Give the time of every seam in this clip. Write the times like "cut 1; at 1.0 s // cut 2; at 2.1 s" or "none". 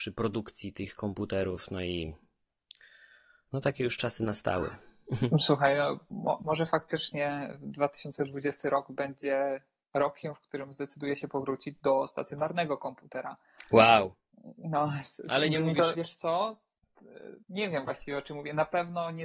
cut 1; at 15.9 s // cut 2; at 17.4 s